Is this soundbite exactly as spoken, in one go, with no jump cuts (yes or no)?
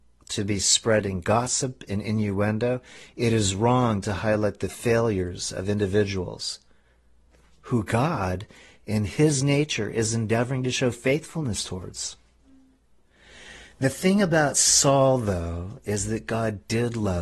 yes